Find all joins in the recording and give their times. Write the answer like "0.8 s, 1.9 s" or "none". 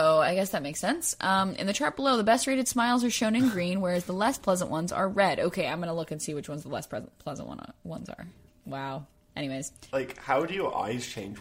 8.5 s, 9.9 s